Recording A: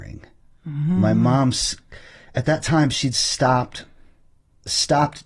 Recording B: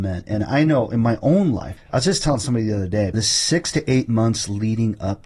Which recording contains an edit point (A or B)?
B